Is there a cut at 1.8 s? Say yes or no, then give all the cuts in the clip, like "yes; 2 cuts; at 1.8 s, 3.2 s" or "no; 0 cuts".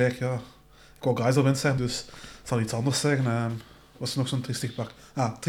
yes; 1 cut; at 1.8 s